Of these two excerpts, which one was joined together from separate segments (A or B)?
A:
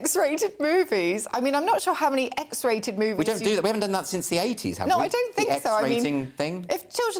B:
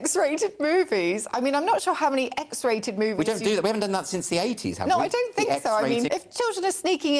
B